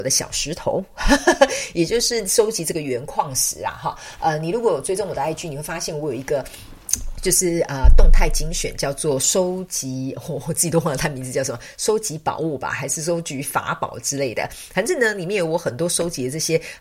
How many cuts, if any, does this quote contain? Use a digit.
0